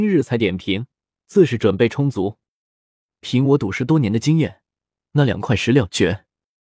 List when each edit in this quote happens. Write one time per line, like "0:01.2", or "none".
0:03.2